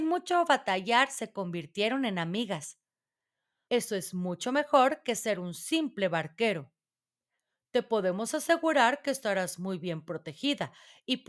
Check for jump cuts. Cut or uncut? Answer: cut